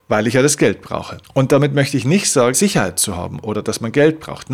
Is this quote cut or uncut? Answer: cut